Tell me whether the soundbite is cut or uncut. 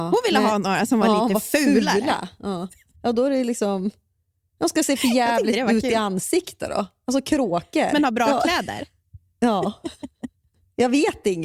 uncut